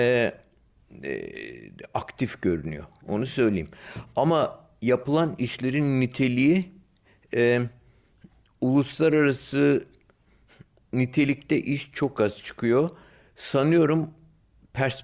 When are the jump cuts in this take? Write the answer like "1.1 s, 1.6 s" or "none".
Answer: none